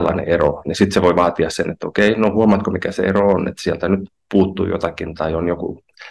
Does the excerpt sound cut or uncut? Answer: uncut